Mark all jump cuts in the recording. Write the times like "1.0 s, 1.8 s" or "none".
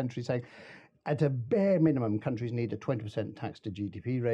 none